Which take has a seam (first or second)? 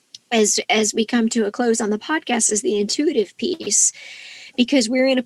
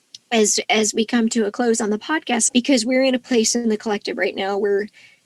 second